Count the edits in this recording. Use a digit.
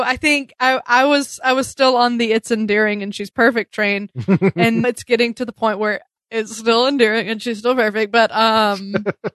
1